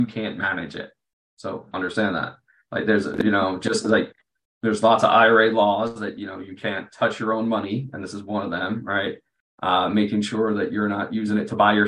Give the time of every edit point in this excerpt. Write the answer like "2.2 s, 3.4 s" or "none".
none